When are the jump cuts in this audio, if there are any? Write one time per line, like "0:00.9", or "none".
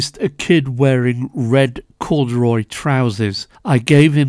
none